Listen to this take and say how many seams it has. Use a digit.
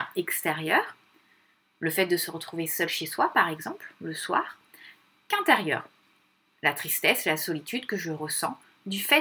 0